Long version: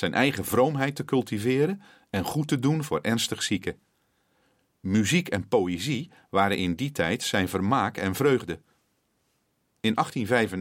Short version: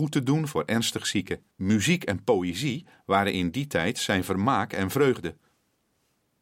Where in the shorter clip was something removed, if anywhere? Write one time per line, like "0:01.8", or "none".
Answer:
0:01.5